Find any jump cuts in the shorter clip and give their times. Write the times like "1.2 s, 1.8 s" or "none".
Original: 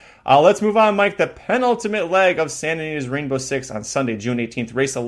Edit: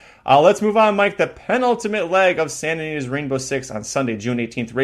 none